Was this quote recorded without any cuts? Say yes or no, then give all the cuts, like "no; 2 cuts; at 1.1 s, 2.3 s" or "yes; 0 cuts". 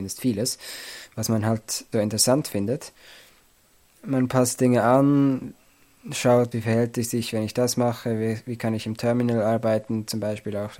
no; 2 cuts; at 1.9 s, 6.5 s